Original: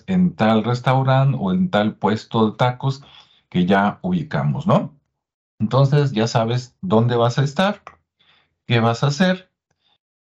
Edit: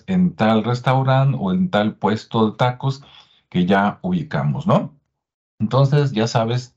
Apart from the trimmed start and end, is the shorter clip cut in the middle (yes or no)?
no